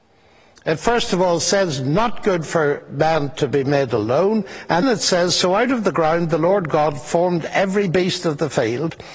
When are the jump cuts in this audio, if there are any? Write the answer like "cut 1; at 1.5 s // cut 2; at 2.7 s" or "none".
cut 1; at 4.8 s